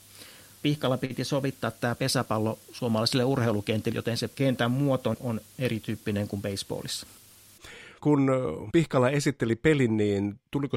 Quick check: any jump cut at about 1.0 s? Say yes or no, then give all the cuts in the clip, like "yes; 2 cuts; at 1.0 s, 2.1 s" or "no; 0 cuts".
no; 1 cut; at 3.9 s